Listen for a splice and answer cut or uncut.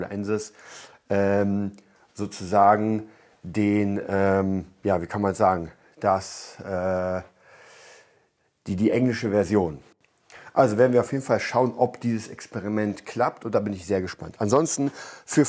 uncut